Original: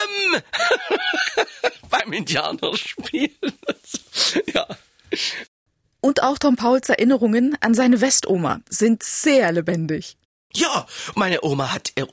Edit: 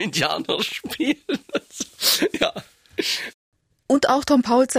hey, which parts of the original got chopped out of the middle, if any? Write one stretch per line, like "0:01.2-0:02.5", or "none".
none